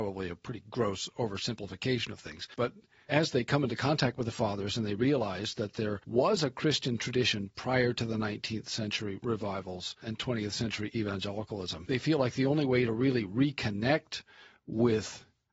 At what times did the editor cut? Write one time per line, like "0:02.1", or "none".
none